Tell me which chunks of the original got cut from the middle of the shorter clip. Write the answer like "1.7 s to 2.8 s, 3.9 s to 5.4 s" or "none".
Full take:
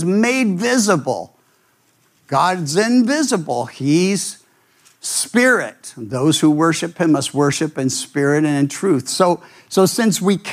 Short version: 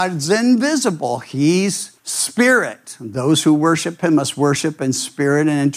4.5 s to 5.0 s